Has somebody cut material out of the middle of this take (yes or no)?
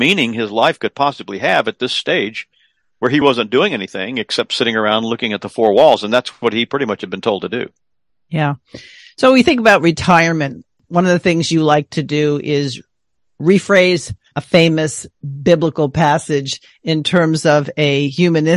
yes